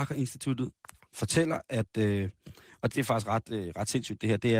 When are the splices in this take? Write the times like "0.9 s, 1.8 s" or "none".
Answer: 2.9 s